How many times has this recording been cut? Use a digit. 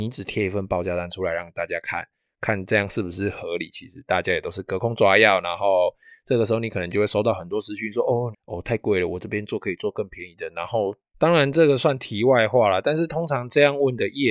2